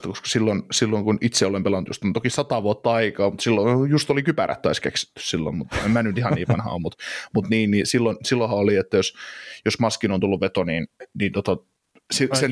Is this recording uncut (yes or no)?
yes